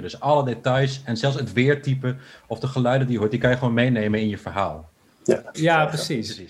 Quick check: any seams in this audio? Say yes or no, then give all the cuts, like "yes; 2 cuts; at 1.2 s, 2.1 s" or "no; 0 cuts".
yes; 1 cut; at 5.5 s